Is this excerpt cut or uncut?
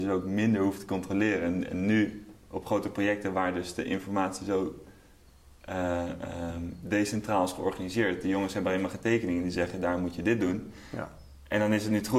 uncut